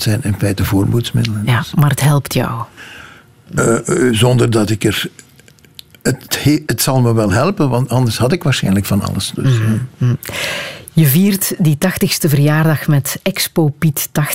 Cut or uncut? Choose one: uncut